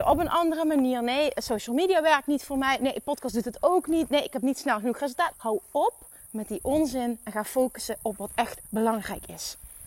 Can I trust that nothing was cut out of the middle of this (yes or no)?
no